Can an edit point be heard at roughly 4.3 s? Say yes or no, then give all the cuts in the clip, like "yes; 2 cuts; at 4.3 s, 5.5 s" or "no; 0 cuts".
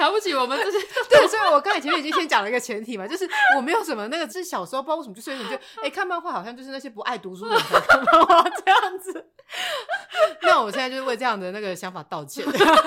yes; 1 cut; at 4.3 s